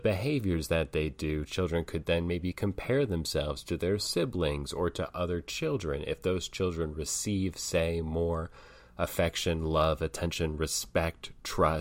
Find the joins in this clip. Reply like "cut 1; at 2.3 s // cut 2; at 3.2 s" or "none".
none